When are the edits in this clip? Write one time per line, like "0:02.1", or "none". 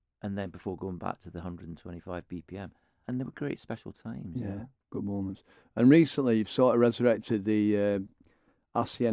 0:03.0